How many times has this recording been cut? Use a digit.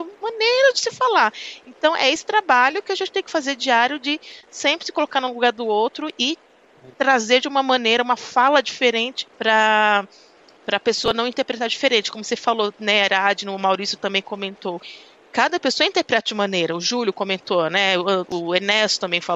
1